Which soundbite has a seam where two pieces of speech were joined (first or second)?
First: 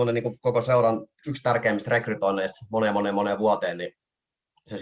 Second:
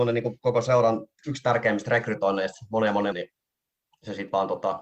second